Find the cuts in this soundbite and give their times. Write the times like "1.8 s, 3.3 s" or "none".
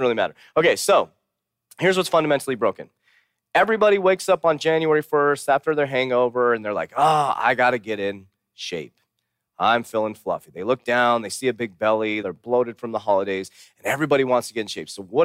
12.2 s